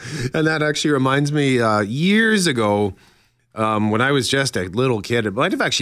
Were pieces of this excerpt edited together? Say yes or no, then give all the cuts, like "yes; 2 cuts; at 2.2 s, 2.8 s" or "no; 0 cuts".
no; 0 cuts